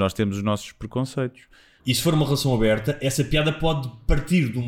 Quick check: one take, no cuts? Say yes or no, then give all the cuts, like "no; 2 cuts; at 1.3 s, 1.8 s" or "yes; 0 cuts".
no; 1 cut; at 1.8 s